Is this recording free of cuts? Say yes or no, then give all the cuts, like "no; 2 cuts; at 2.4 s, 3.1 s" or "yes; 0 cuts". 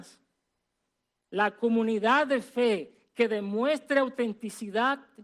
yes; 0 cuts